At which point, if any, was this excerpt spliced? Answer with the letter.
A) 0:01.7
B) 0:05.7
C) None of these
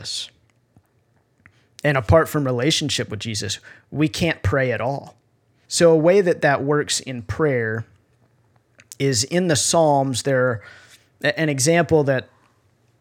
B